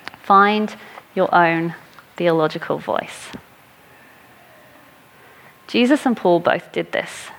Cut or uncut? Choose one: uncut